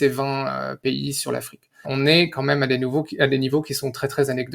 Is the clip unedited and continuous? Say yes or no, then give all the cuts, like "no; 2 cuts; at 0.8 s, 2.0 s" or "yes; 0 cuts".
no; 1 cut; at 1.8 s